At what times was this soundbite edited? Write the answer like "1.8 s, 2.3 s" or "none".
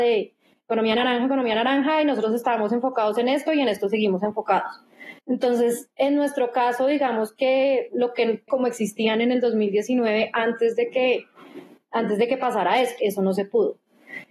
5.2 s, 8.5 s, 13.0 s